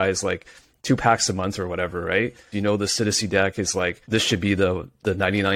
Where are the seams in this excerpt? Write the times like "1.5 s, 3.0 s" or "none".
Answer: 2.5 s, 4.0 s